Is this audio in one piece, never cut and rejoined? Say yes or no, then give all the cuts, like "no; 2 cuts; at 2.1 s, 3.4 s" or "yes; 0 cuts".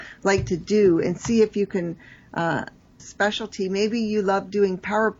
no; 1 cut; at 3.0 s